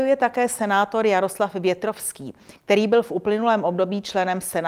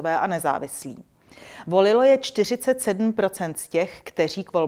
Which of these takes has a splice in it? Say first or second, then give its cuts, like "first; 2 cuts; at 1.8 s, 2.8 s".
second; 1 cut; at 1.6 s